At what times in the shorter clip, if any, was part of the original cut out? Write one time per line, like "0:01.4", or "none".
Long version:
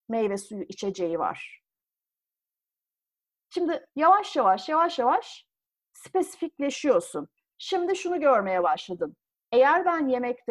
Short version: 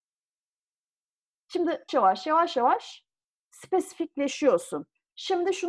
0:01.9